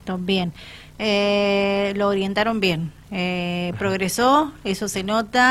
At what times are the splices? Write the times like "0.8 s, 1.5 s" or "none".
none